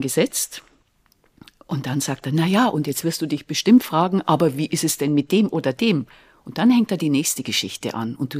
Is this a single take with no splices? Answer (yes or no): yes